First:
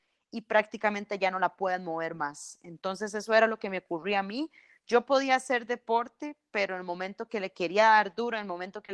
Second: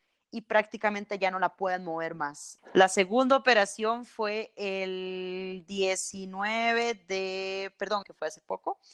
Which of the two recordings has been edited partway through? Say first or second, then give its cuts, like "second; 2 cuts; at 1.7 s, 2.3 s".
second; 2 cuts; at 2.6 s, 8.0 s